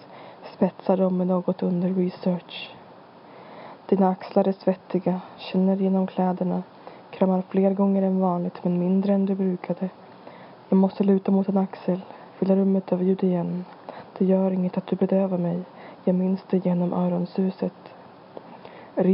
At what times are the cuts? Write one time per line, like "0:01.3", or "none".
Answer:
none